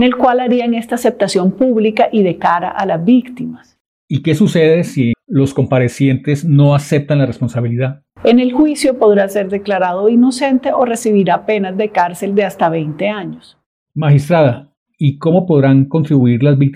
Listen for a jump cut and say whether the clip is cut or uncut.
cut